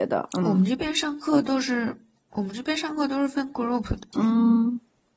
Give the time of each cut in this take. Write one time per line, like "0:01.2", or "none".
0:04.1